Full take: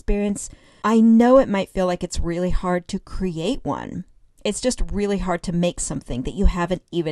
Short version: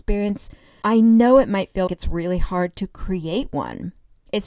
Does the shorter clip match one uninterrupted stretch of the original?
no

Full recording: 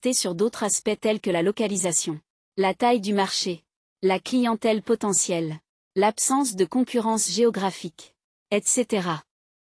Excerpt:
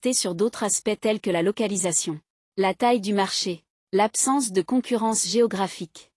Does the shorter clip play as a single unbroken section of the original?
no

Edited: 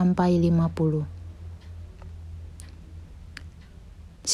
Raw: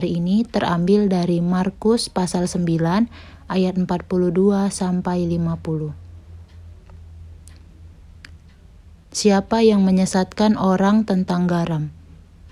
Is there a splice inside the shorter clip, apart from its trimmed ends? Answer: no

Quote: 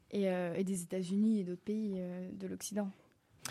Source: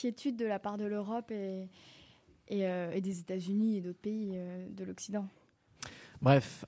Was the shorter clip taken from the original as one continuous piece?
yes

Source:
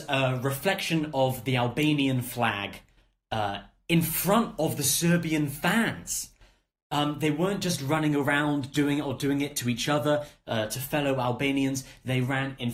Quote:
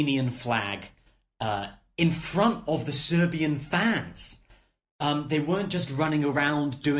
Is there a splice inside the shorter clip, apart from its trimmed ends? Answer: no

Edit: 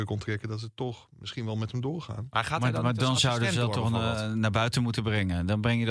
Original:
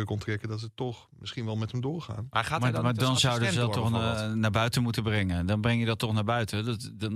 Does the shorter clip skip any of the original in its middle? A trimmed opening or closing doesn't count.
no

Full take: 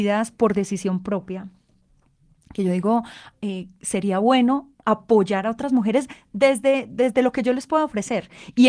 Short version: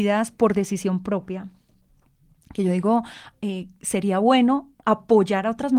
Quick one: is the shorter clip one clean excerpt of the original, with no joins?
yes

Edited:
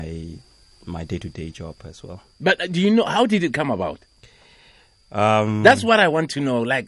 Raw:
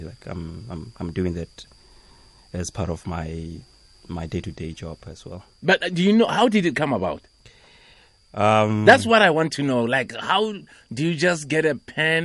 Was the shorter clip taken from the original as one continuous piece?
yes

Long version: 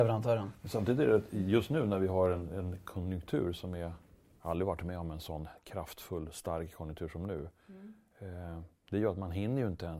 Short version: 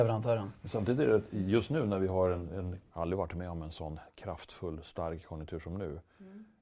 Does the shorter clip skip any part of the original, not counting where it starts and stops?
yes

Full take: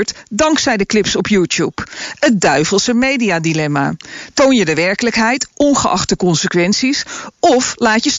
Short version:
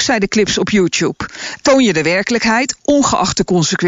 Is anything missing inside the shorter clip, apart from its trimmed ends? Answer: yes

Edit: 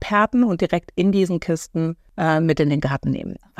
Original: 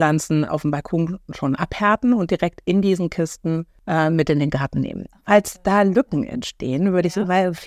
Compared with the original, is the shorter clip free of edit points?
yes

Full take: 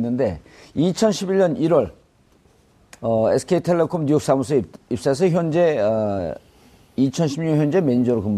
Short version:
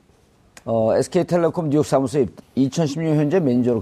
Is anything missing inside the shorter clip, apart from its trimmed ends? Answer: yes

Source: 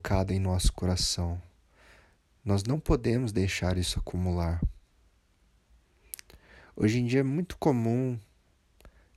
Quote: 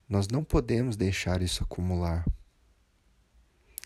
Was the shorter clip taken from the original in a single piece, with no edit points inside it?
yes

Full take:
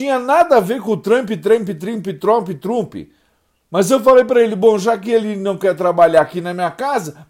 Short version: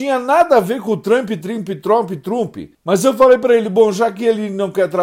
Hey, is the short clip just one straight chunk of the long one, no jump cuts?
no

